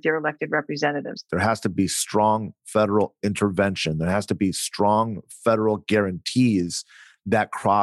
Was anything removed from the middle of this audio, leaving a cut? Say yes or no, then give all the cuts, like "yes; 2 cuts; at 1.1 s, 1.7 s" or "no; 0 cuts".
yes; 1 cut; at 1.3 s